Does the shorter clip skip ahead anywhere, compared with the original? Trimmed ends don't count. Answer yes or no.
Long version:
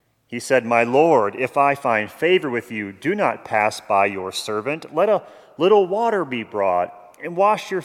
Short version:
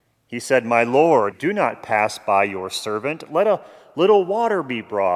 yes